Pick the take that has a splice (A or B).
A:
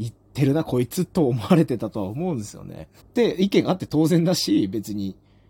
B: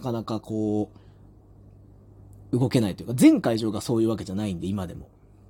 A